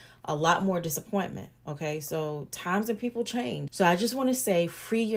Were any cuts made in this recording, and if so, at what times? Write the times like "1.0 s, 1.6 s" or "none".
3.7 s